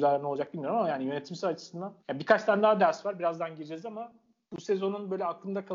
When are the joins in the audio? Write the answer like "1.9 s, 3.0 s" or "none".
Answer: 2.0 s